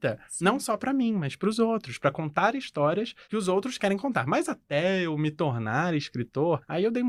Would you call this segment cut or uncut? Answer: uncut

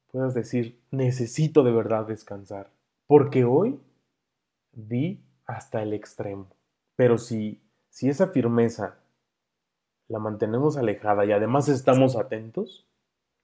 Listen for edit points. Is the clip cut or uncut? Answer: cut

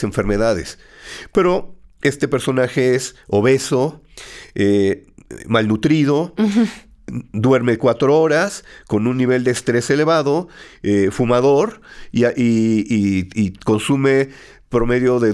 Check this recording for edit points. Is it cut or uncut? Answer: uncut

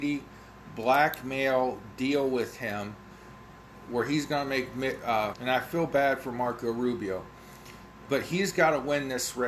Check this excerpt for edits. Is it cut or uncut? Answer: cut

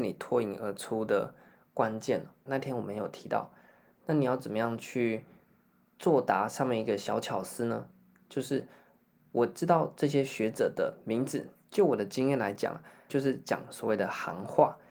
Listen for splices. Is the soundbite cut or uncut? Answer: cut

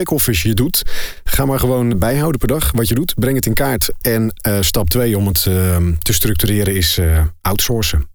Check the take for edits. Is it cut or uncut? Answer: cut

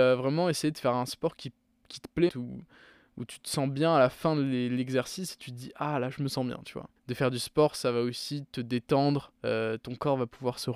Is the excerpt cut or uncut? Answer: cut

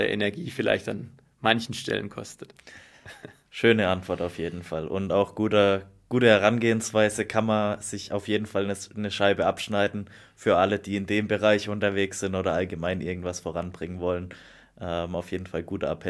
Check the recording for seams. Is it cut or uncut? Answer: uncut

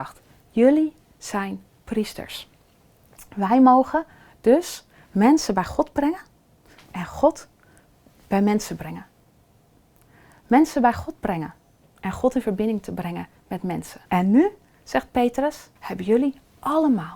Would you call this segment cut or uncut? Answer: cut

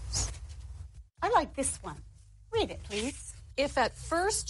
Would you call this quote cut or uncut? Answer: cut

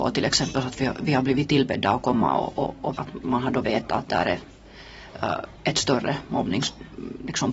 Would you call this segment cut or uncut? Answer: cut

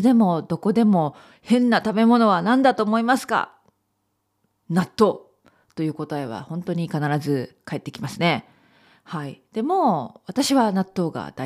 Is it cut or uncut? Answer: uncut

